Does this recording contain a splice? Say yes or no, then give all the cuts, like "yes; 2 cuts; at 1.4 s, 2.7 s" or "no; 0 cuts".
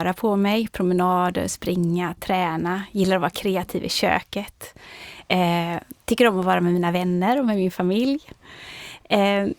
no; 0 cuts